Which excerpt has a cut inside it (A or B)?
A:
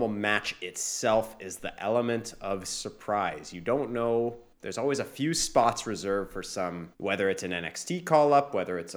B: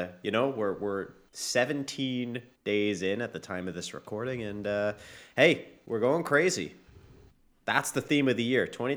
A